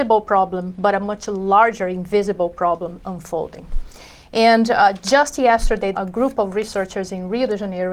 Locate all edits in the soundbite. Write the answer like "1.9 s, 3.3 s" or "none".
5.9 s